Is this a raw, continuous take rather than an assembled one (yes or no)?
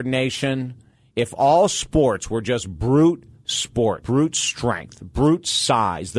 no